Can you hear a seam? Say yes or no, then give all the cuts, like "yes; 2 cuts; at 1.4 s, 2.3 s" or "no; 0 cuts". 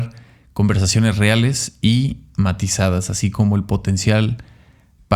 no; 0 cuts